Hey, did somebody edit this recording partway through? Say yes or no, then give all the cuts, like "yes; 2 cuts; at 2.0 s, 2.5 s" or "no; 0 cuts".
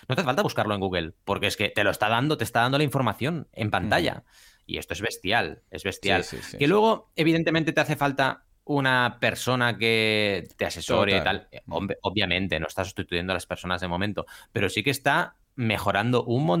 no; 0 cuts